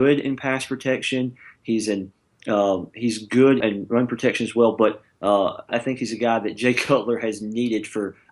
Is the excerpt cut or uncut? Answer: cut